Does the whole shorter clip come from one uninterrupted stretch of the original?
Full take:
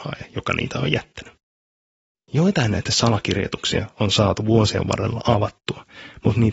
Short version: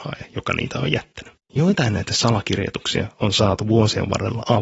no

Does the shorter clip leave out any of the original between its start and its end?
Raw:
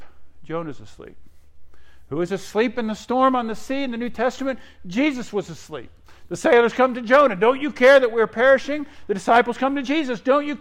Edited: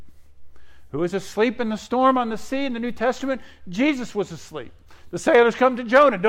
no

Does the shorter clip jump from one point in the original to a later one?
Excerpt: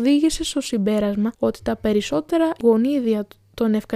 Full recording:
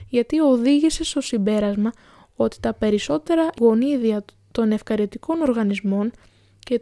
yes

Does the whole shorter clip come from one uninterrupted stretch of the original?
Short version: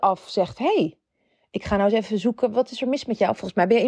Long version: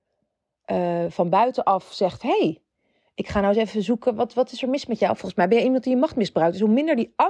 no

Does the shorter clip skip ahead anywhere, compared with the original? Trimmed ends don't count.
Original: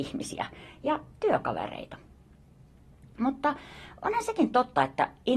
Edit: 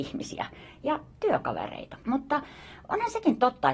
yes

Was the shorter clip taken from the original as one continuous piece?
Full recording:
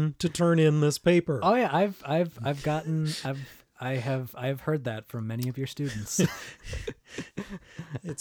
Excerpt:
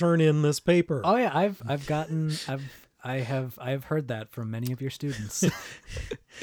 no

